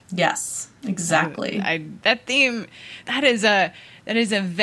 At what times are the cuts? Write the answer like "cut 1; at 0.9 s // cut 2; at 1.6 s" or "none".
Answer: cut 1; at 2.0 s // cut 2; at 3.0 s